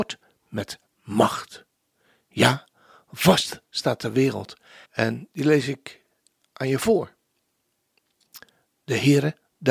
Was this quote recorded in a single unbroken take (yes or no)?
no